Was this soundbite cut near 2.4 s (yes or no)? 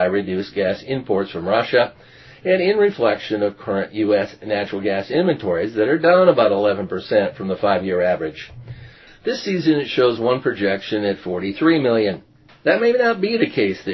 no